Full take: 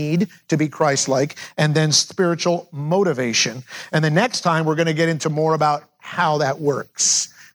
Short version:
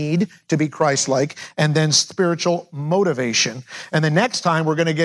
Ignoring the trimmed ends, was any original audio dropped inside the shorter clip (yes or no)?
no